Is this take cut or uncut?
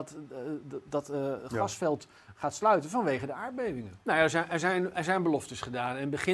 cut